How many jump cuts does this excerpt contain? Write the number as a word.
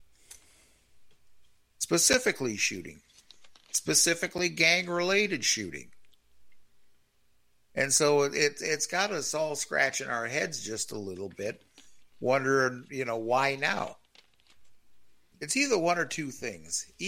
one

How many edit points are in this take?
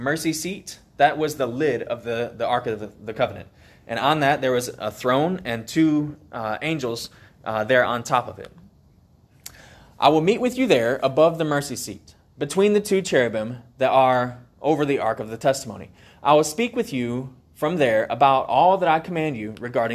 zero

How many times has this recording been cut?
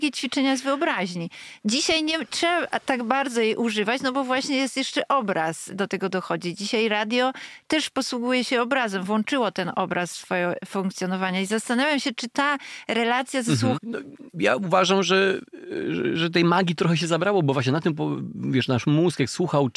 one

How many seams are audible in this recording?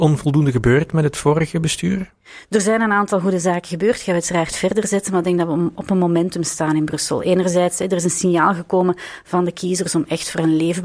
zero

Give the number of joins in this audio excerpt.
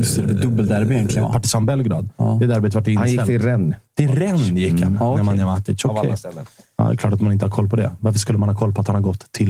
one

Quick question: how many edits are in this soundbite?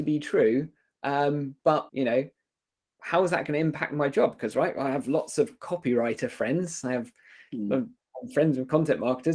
one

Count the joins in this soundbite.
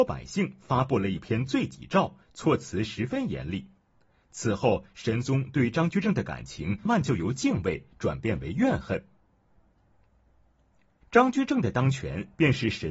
two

